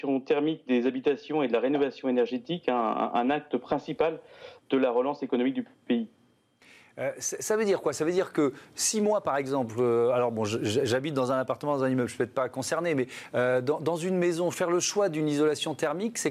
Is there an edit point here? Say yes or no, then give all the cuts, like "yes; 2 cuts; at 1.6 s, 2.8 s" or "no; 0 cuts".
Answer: no; 0 cuts